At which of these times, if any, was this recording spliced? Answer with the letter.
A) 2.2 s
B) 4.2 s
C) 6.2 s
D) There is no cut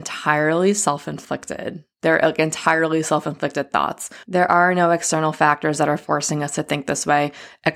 D